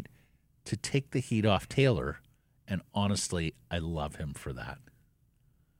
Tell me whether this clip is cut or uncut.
uncut